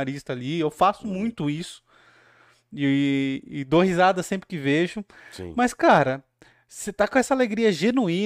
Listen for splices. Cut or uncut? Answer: uncut